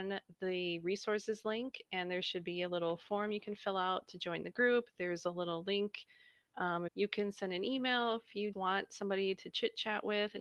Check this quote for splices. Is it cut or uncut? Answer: cut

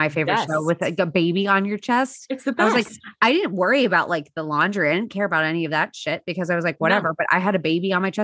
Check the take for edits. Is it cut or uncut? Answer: uncut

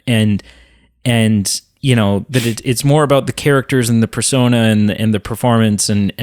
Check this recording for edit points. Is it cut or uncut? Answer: uncut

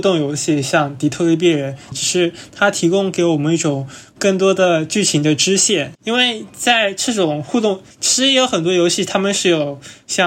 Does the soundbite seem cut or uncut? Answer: cut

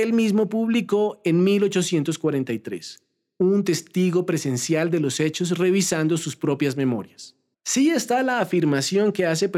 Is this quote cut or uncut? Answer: cut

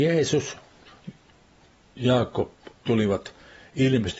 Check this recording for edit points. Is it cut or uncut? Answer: cut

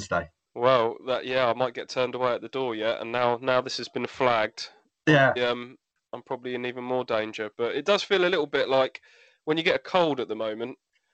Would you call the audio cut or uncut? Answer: cut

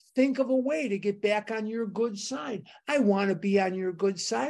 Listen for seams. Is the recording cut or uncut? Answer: uncut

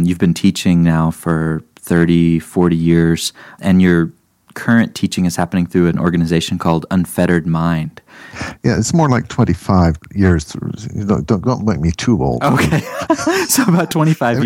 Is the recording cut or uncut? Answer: uncut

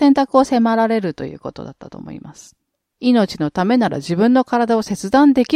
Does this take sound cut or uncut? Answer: uncut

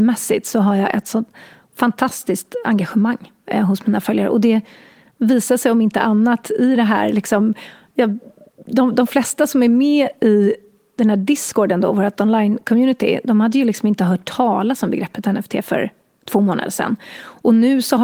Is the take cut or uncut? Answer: uncut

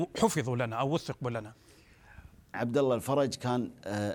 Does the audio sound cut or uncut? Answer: cut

